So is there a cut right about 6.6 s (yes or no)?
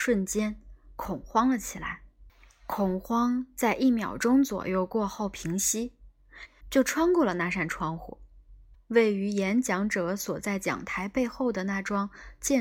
yes